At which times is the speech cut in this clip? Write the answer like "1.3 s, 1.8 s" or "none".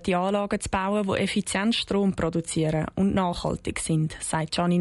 none